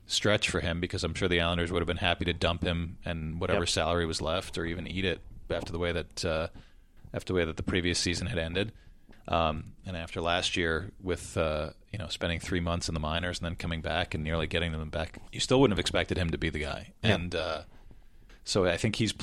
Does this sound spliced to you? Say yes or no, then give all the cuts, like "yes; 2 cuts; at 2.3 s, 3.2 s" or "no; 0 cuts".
yes; 1 cut; at 15.3 s